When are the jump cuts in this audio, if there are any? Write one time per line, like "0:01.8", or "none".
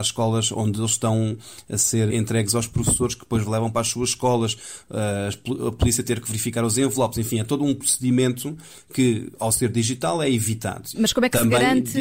0:02.1
0:10.9